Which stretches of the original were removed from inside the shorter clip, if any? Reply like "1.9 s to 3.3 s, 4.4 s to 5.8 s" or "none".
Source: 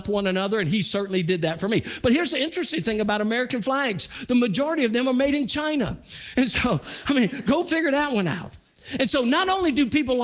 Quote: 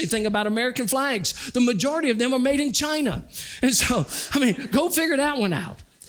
none